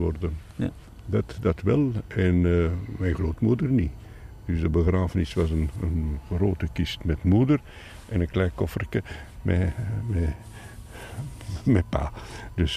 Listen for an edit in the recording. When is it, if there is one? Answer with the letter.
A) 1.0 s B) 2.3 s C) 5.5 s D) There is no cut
D